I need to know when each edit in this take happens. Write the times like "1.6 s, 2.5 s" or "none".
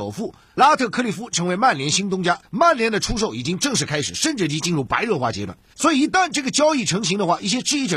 2.4 s, 5.7 s